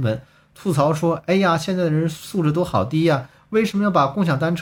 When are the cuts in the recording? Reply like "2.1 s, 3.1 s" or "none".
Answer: none